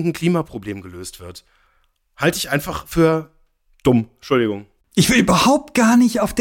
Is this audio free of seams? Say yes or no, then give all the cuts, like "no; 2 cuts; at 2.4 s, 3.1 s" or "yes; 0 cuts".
yes; 0 cuts